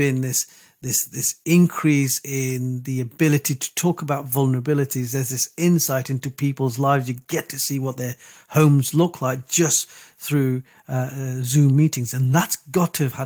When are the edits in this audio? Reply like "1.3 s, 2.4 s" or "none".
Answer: none